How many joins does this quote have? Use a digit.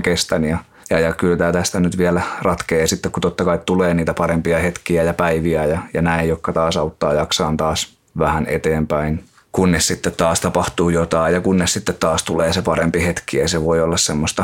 0